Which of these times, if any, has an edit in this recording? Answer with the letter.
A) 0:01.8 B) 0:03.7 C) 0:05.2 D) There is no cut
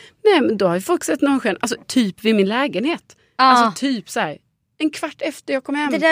A